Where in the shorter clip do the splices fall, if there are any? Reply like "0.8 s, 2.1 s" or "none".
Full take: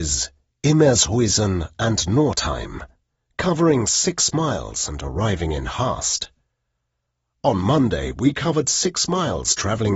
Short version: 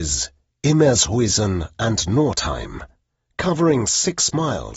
none